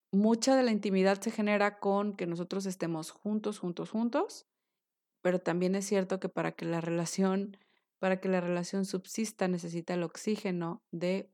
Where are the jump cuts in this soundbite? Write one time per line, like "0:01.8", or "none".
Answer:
none